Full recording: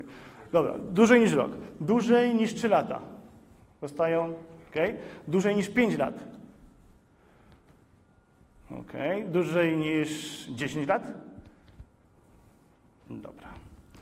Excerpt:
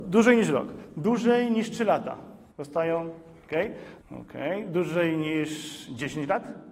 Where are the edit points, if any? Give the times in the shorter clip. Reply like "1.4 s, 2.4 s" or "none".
2.5 s, 4.0 s